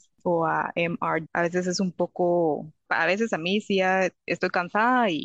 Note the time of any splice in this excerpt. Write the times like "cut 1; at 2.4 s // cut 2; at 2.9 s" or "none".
cut 1; at 1.3 s // cut 2; at 2.9 s